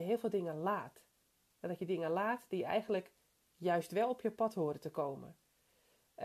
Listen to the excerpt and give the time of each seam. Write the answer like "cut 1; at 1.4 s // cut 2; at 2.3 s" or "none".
none